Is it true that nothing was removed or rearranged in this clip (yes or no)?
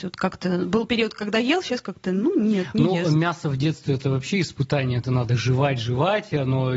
yes